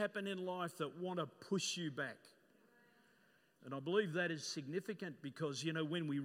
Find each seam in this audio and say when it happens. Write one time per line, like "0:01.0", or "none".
0:03.6